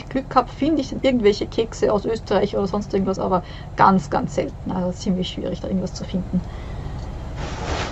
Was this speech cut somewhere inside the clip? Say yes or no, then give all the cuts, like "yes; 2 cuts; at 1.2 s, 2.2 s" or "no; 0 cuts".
no; 0 cuts